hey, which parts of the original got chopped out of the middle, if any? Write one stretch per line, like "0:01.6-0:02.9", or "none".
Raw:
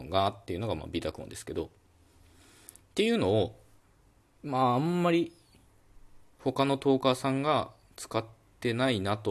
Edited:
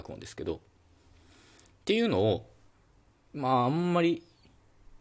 none